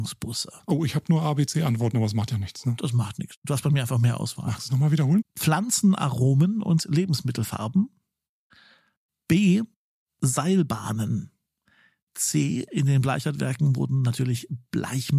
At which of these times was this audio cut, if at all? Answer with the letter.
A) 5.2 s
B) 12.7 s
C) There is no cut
A